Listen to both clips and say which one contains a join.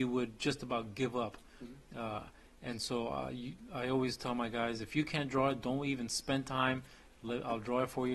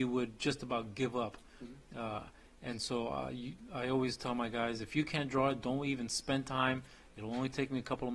first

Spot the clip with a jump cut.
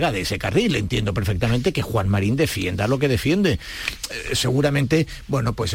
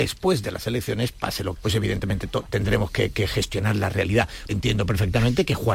second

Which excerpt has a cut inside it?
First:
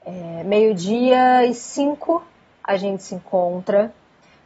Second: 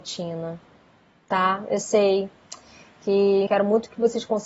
second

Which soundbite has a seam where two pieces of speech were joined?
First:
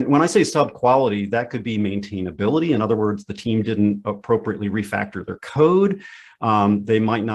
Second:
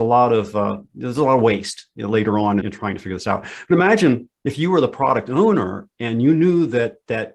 second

